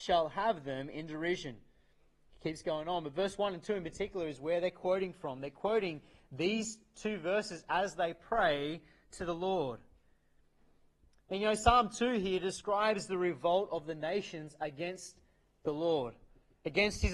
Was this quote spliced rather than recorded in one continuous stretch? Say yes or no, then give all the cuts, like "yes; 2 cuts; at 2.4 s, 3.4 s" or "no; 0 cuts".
no; 0 cuts